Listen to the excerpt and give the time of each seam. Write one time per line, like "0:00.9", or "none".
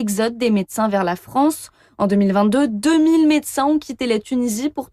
none